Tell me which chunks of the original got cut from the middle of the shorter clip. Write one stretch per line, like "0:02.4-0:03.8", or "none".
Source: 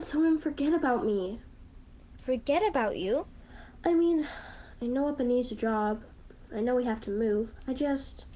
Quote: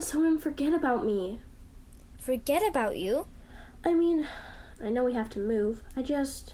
0:04.8-0:06.5